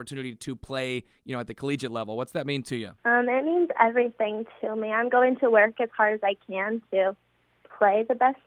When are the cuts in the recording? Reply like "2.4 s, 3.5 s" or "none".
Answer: 3.0 s

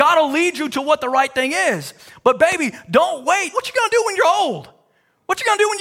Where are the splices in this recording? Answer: 3.5 s

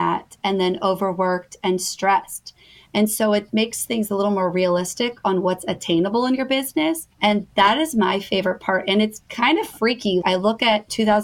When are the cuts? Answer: 7.1 s, 10.2 s

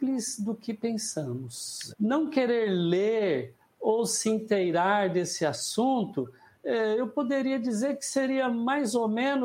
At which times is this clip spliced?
1.9 s

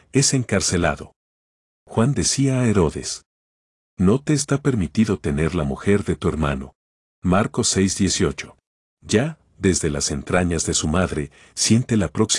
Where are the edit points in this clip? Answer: 8.9 s

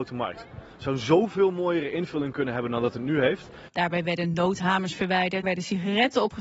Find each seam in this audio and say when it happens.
3.7 s, 5.4 s

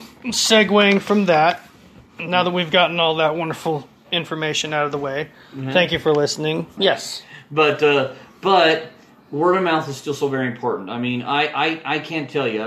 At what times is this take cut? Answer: 6.8 s

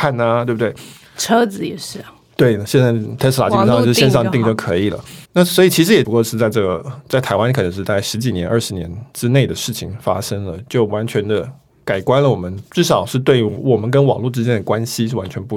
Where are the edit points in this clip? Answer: 5.2 s

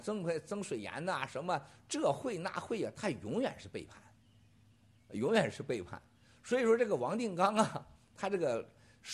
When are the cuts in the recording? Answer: none

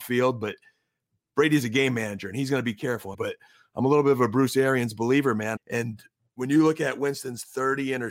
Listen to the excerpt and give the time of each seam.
3.1 s, 5.6 s

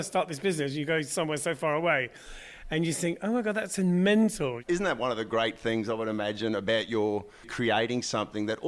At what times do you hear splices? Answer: 7.4 s

